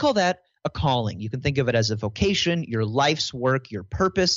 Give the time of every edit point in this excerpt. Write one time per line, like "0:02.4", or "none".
none